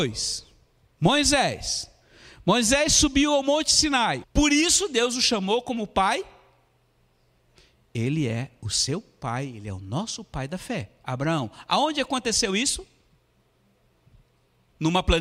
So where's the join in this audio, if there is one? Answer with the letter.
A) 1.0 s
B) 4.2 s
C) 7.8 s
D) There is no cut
B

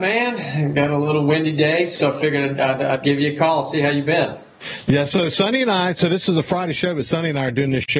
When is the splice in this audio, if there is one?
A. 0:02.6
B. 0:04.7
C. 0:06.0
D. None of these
D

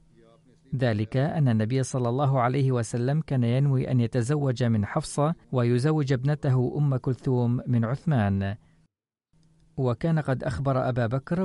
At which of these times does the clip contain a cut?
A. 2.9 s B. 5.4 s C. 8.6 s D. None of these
B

